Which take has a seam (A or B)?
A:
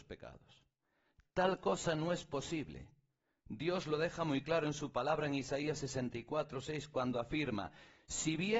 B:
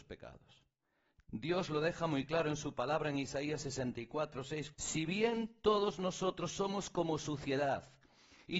B